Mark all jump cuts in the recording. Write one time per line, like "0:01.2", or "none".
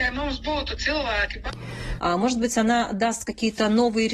0:02.0